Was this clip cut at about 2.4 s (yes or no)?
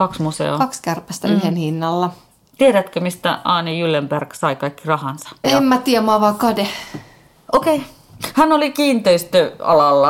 no